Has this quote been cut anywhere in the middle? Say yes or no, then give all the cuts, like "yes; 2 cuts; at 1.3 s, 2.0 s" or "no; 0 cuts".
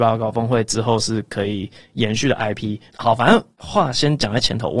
yes; 1 cut; at 2.9 s